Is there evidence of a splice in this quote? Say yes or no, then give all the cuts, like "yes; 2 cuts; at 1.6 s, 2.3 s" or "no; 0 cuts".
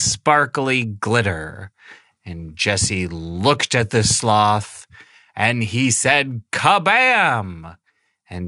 yes; 1 cut; at 2.1 s